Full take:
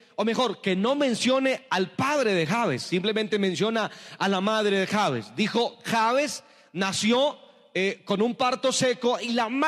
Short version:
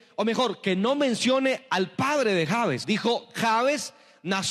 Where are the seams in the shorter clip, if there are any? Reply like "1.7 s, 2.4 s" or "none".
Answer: 2.8 s

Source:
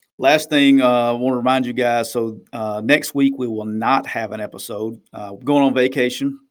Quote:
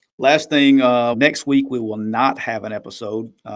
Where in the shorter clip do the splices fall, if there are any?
1.1 s

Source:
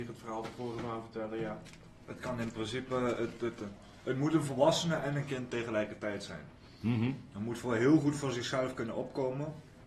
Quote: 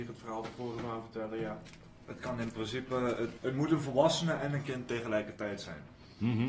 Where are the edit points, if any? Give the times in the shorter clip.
3.4 s

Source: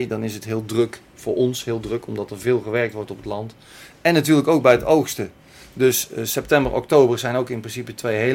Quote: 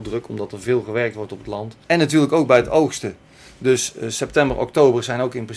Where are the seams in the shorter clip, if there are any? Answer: 1.8 s

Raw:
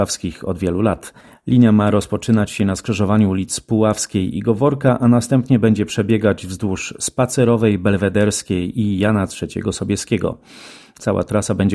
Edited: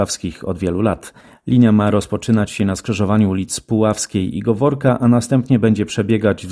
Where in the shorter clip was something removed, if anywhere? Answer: none

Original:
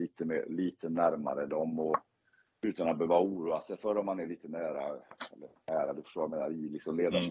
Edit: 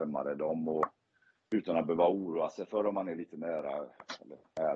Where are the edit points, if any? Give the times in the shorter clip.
none

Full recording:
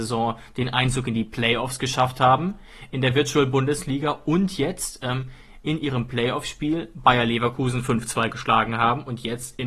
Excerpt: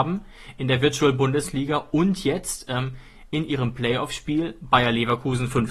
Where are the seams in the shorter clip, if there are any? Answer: none

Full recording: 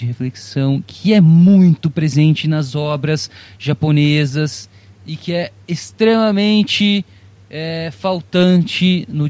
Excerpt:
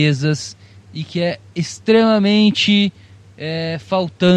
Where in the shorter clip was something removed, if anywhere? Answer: none

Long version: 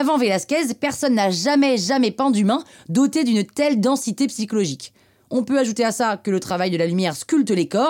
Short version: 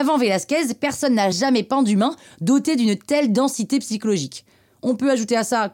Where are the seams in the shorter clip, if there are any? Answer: 1.3 s

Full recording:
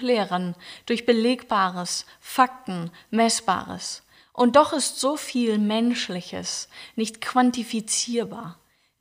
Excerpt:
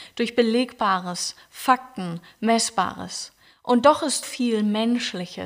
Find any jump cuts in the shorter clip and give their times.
4.2 s

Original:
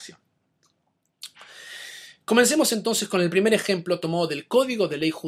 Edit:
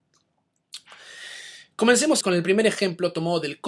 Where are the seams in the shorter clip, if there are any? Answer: 2.2 s

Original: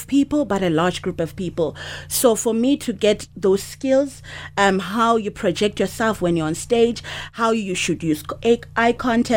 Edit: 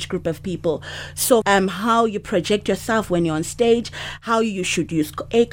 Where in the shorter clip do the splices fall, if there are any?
1.4 s

